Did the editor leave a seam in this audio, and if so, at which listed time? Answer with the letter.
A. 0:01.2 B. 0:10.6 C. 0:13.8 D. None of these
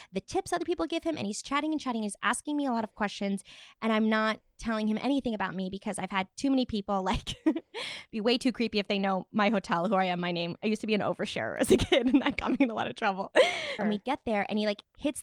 C